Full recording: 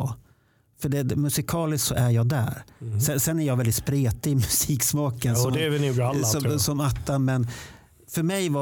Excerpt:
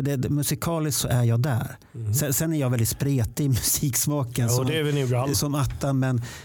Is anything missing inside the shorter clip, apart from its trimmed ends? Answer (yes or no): yes